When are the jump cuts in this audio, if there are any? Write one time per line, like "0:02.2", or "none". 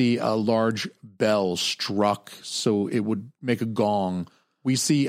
none